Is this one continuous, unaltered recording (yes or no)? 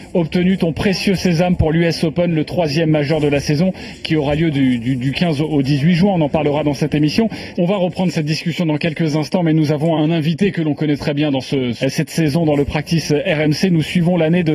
no